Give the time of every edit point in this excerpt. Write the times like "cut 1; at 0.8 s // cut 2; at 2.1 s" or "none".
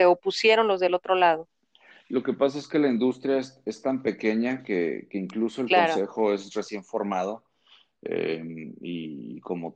none